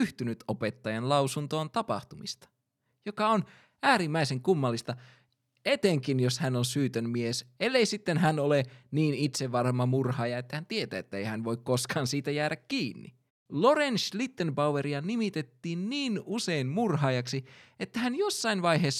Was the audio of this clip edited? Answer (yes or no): yes